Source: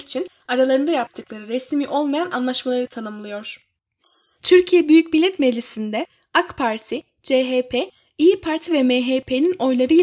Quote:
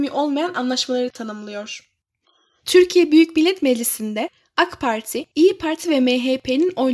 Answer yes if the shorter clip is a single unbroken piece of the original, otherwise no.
no